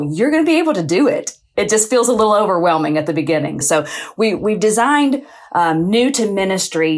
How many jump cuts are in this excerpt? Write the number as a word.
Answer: one